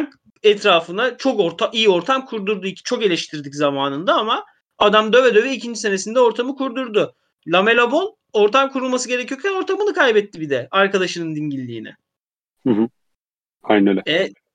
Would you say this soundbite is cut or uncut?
uncut